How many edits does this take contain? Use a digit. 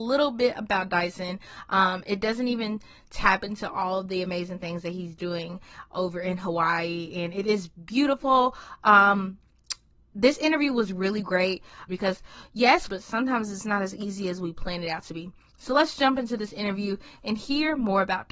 2